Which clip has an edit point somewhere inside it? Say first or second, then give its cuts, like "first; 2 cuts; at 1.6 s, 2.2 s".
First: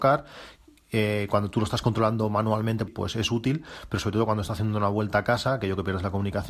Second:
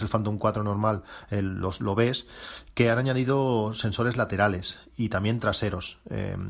first; 1 cut; at 2.9 s